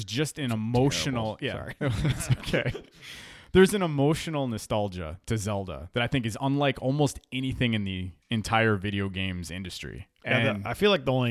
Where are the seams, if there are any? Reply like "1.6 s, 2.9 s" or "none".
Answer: none